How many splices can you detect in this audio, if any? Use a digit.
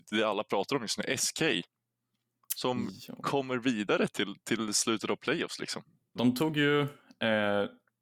1